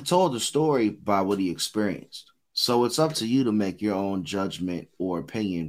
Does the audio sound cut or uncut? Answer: cut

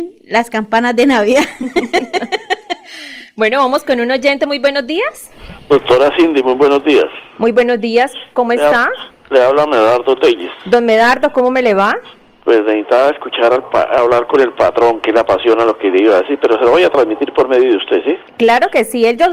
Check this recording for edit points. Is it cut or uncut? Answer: uncut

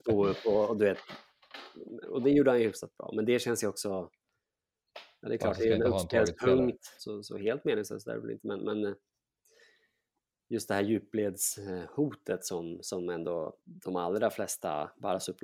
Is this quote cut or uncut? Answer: cut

